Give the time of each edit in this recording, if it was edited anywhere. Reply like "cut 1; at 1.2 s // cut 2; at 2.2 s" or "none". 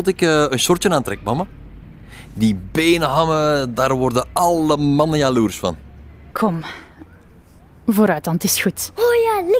cut 1; at 6.3 s